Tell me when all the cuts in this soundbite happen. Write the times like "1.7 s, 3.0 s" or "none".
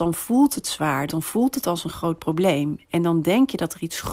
1.1 s